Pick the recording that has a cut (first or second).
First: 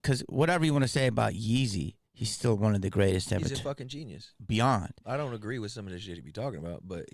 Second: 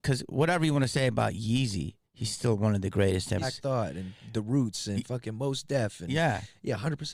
second